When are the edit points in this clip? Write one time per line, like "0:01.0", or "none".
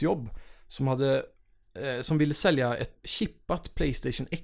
0:03.0